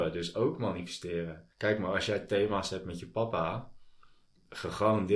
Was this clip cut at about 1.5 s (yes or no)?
yes